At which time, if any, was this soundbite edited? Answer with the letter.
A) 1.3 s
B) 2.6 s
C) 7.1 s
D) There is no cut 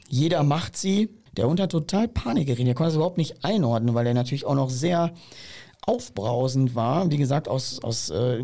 A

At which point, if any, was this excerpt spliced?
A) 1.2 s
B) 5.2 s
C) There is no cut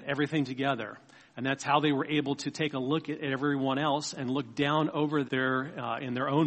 B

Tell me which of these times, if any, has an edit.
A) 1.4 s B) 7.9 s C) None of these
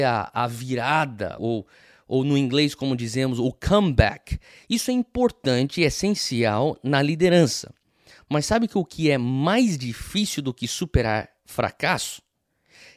A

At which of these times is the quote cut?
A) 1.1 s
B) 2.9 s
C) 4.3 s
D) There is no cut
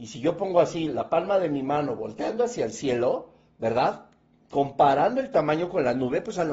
D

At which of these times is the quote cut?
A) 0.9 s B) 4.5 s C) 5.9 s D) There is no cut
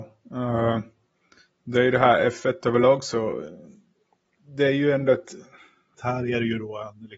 C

